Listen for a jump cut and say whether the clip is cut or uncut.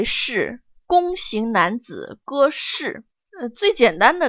cut